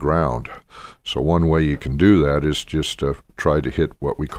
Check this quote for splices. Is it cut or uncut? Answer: uncut